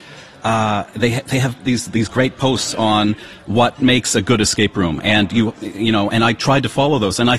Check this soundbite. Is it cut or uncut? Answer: uncut